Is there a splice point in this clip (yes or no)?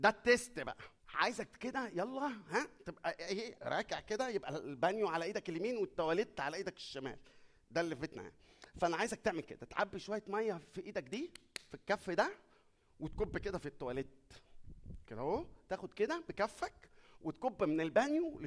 yes